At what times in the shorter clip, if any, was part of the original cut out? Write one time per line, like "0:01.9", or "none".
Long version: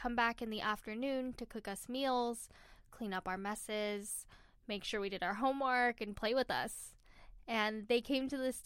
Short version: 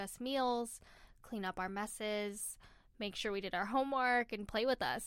none

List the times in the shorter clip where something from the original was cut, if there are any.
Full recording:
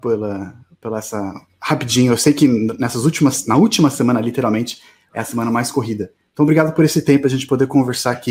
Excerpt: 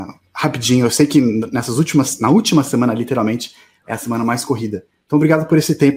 none

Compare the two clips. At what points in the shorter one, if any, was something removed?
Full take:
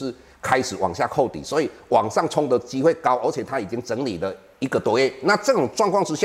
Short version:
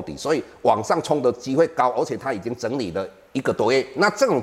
none

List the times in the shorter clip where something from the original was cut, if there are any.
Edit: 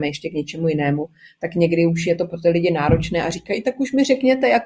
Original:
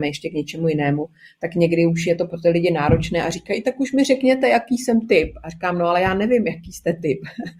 none

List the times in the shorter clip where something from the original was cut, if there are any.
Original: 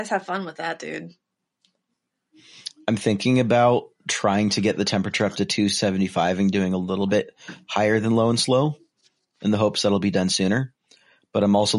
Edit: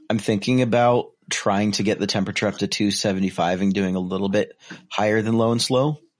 none

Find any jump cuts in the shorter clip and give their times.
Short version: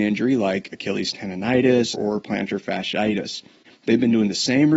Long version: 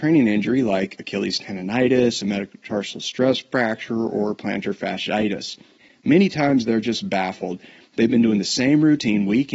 0:01.9
0:03.7

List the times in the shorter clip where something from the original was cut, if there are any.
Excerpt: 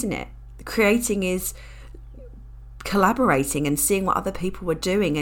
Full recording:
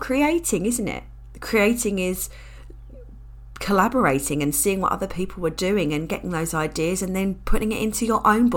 none

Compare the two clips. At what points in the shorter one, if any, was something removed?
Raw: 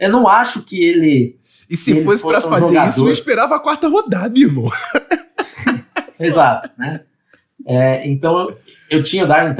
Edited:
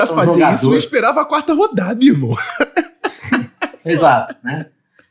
none

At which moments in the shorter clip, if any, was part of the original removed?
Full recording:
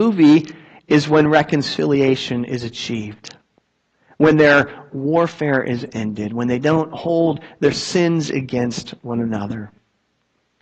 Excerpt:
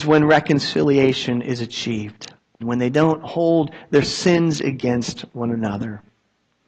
0:02.6

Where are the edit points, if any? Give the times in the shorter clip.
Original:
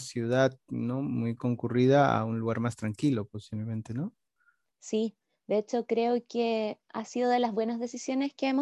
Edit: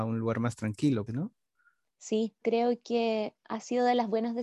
0:01.1
0:02.4

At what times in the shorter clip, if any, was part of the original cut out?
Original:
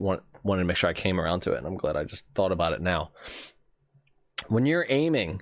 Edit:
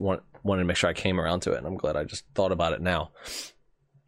none

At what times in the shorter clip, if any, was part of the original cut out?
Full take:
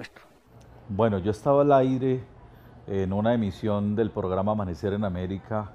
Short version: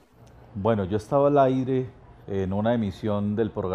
0:02.2

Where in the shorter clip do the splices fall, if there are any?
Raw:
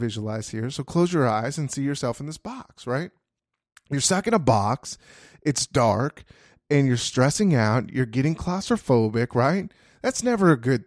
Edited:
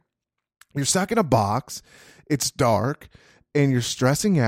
none

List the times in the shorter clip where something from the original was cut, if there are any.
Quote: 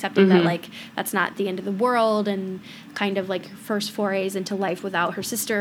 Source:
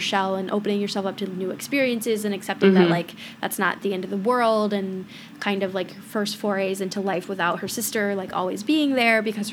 none

